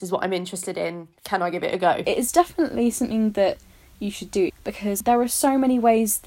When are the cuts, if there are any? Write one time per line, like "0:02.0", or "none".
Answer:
none